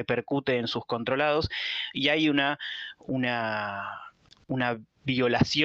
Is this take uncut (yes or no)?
yes